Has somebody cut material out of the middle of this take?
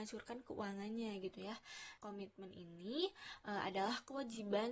yes; 1 cut; at 2.0 s

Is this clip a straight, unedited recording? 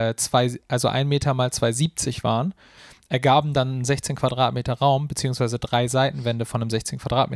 yes; 0 cuts

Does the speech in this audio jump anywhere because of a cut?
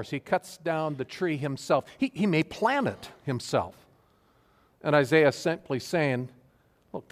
no; 0 cuts

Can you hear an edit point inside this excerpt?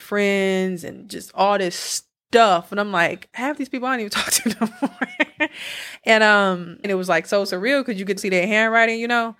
yes; 2 cuts; at 6.8 s, 8.2 s

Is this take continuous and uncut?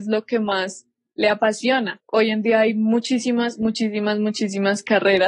yes; 0 cuts

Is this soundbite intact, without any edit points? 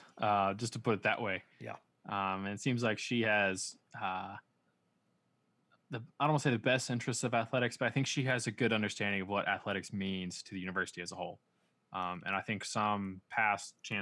yes; 0 cuts

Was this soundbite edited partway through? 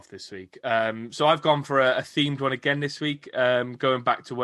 no; 0 cuts

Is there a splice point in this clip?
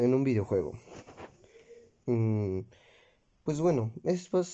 yes; 1 cut; at 2.0 s

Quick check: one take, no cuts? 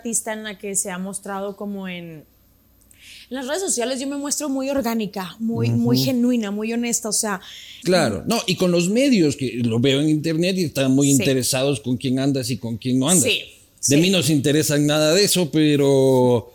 no; 1 cut; at 7.8 s

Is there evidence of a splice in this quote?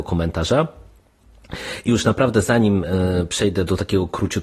no; 0 cuts

